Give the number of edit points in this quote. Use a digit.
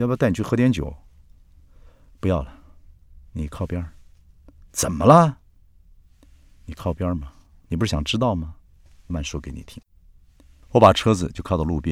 1